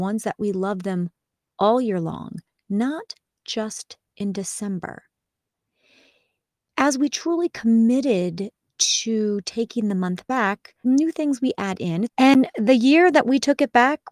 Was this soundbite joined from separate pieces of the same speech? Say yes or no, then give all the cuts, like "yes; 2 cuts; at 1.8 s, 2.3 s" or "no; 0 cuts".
yes; 2 cuts; at 10.8 s, 12.1 s